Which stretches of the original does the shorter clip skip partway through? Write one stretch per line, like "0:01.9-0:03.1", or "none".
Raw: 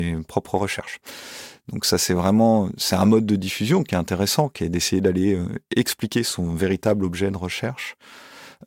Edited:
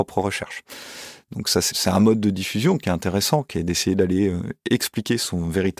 0:02.1-0:02.8